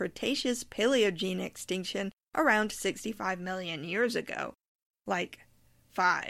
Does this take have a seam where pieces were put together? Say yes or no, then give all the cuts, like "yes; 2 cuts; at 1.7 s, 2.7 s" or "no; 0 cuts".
yes; 1 cut; at 4.9 s